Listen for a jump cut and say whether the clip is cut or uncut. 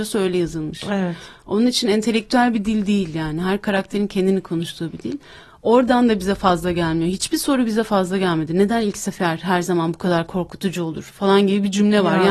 uncut